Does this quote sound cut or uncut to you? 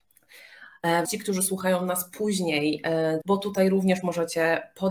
cut